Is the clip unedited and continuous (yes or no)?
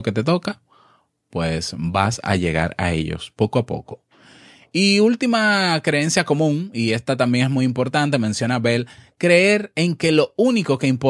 yes